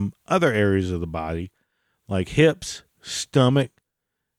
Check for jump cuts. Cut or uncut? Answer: uncut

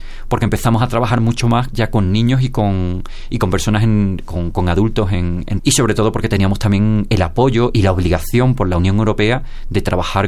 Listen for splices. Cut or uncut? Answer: cut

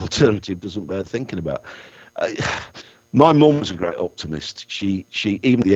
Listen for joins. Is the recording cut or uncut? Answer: uncut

